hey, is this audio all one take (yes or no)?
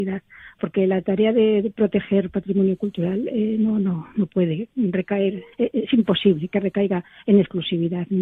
no